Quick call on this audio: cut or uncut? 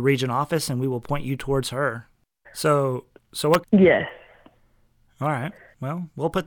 cut